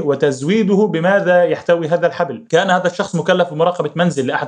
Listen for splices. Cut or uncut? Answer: uncut